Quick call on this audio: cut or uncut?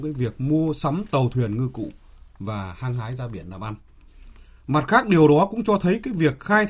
uncut